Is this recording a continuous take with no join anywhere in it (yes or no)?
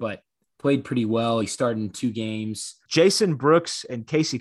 no